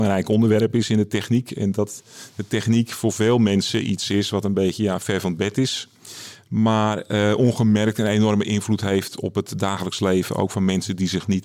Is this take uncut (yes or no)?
yes